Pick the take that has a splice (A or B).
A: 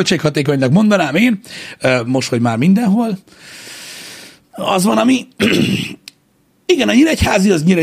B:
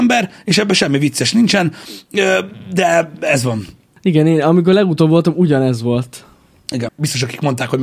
B